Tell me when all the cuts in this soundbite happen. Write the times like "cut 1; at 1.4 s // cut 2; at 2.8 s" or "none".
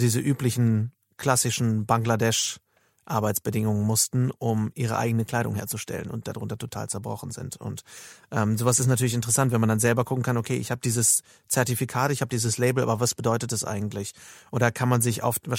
none